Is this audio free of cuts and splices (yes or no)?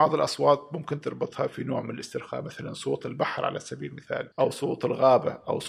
no